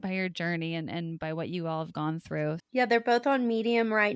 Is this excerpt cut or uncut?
cut